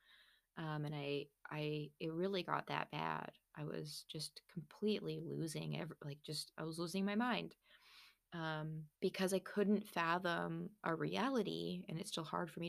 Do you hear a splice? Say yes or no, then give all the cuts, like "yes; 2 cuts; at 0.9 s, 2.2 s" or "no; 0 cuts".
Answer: yes; 1 cut; at 9.0 s